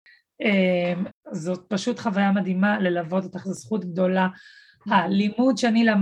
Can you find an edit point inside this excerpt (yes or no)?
yes